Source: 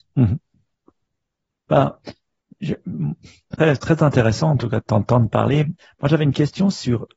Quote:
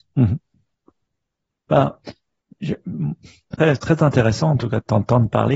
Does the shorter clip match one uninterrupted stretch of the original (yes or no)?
yes